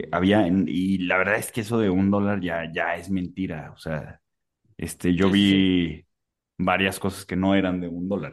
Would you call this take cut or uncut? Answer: uncut